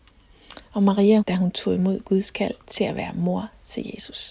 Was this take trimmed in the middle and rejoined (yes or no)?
yes